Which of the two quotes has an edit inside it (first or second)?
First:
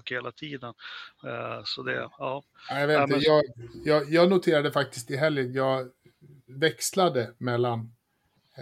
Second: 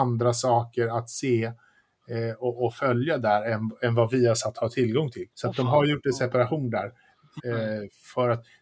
second